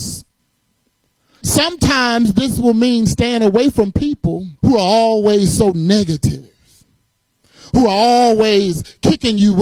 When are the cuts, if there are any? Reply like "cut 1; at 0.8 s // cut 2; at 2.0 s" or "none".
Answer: cut 1; at 1.4 s // cut 2; at 4.6 s